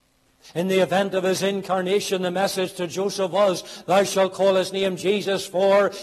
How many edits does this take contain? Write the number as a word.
zero